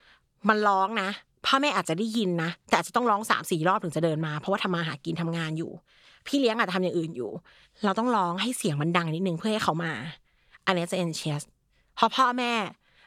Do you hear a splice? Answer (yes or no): no